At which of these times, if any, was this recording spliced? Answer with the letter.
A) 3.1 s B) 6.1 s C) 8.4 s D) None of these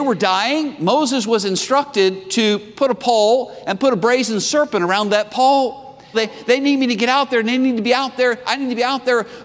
B